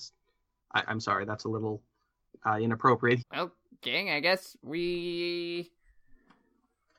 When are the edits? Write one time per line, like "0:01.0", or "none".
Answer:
0:03.2